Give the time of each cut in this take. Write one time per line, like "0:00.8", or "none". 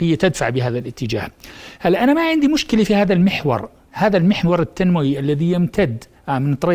none

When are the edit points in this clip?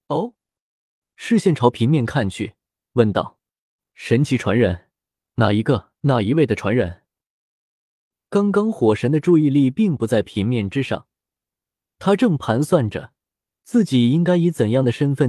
0:01.0
0:06.0

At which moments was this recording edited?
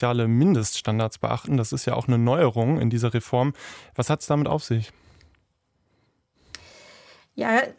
none

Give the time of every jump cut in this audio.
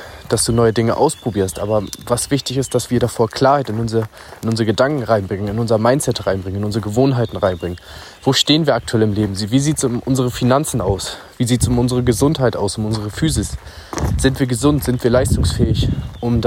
0:02.9

